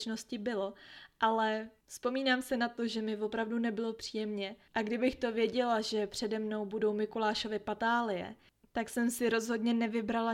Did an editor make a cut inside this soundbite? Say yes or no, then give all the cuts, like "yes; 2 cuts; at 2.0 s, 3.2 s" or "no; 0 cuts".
no; 0 cuts